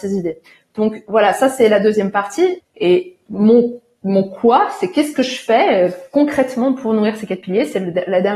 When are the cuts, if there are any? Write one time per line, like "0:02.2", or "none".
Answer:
0:02.6